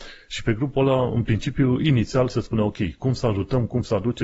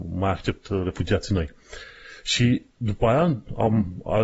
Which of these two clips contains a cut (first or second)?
second